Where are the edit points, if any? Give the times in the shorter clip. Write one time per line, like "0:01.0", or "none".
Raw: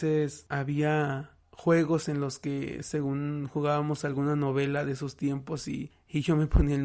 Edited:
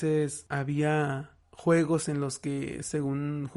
none